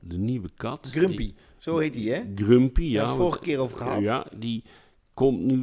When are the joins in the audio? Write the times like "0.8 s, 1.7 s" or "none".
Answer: 4.3 s